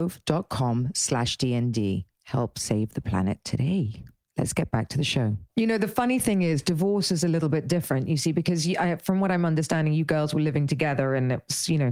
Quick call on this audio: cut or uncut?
cut